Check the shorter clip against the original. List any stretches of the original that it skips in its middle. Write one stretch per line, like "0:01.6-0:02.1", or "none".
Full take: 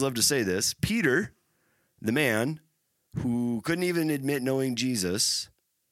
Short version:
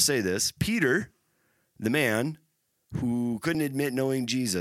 0:03.8-0:04.0